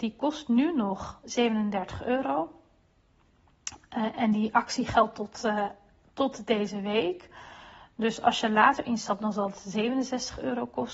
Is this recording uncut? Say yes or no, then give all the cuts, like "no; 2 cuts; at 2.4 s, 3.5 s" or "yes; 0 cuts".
yes; 0 cuts